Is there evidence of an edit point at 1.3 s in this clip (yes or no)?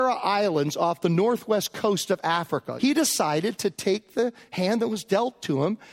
no